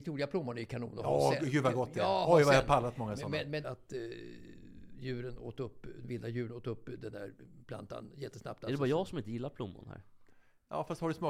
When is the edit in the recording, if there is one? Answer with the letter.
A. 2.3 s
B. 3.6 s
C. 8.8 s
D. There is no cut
B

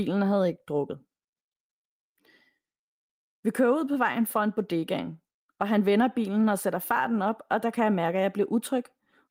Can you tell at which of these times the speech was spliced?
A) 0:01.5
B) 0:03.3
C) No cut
C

